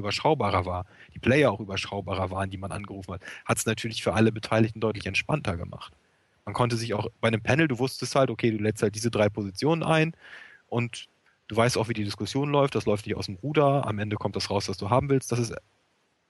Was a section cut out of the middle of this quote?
no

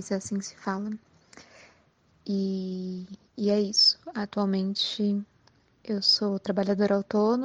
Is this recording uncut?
yes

